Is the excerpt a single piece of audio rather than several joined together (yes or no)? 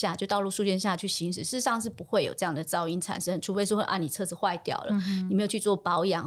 yes